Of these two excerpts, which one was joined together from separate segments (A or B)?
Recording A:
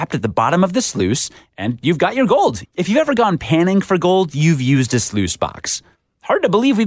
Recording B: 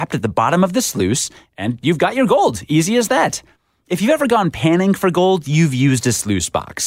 A